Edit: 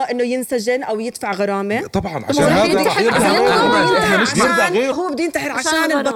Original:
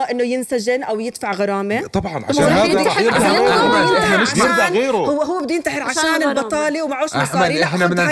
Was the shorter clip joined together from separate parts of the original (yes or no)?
yes